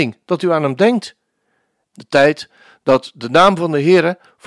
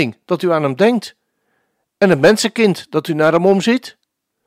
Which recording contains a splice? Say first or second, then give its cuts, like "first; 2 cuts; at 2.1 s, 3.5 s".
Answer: first; 1 cut; at 1.9 s